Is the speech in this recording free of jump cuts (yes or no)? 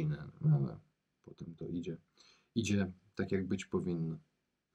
yes